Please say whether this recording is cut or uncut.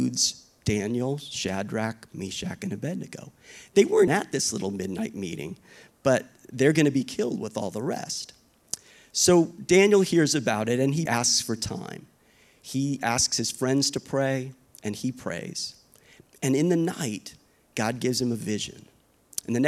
cut